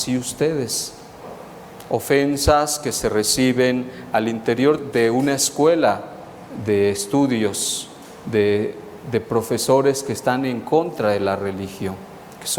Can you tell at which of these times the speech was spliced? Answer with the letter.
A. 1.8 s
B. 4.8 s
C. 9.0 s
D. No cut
B